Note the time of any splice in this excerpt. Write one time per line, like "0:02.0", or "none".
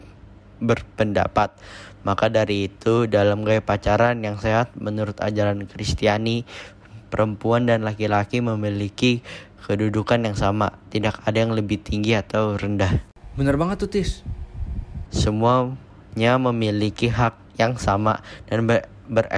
0:15.1
0:17.5